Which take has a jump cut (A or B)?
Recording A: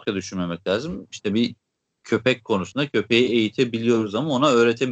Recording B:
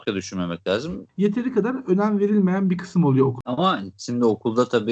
B